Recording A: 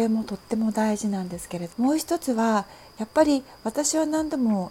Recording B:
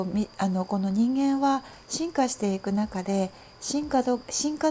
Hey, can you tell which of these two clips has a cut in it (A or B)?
A